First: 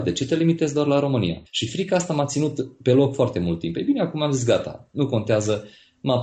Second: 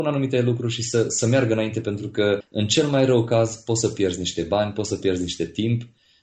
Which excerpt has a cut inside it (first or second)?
first